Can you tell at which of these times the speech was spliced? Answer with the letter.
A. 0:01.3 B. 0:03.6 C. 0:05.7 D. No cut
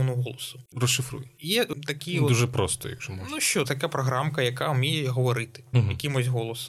B